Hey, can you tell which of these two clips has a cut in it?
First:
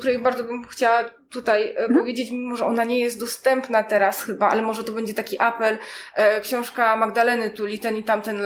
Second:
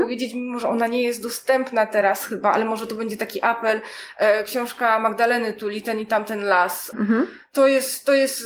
second; 1 cut; at 6.9 s

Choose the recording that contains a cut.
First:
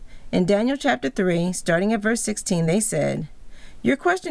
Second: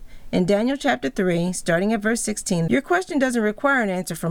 second; 1 cut; at 2.7 s

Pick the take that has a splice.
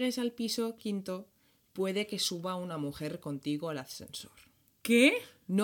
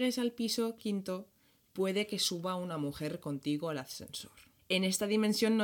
second; 1 cut; at 4.6 s

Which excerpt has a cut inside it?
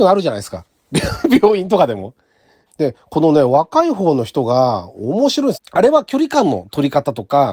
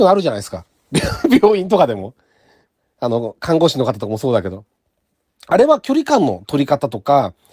first; 2 cuts; at 2.7 s, 5.5 s

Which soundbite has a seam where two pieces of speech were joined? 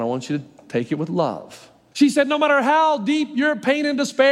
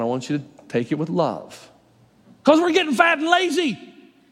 first; 1 cut; at 1.9 s

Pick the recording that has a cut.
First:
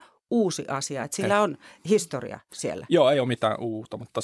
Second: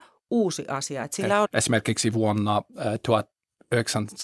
second; 1 cut; at 1.4 s

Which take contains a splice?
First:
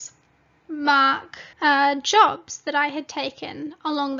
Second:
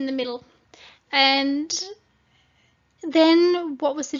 first; 1 cut; at 1.5 s

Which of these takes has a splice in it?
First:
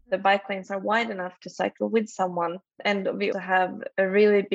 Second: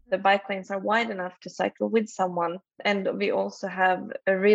first; 1 cut; at 3.3 s

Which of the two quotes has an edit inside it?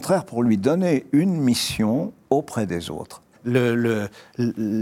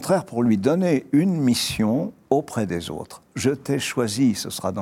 first; 1 cut; at 3.3 s

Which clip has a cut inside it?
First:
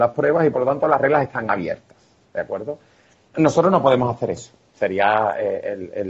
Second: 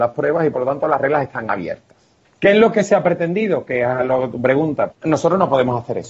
second; 2 cuts; at 2.2 s, 4.9 s

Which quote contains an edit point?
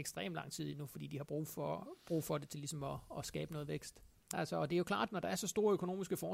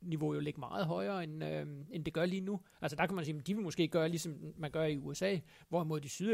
first; 1 cut; at 4.3 s

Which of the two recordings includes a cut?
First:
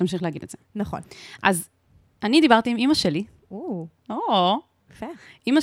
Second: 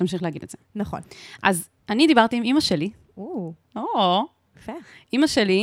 second; 1 cut; at 1.8 s

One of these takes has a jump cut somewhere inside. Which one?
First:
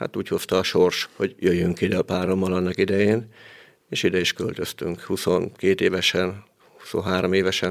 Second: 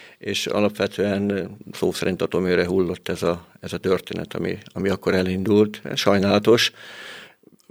first; 1 cut; at 1.0 s

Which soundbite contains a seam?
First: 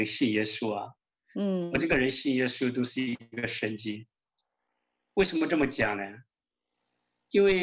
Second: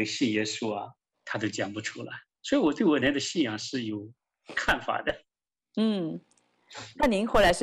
second; 2 cuts; at 1.1 s, 3.0 s

